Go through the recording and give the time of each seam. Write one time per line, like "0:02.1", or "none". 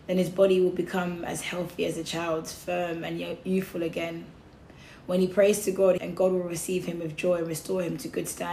0:06.0